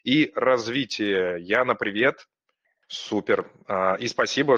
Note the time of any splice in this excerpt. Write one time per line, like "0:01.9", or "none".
0:02.8